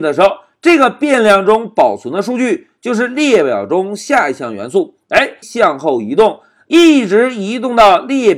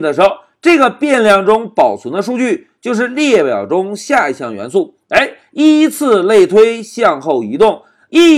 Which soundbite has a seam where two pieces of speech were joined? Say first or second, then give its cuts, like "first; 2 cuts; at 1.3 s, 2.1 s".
first; 1 cut; at 5.4 s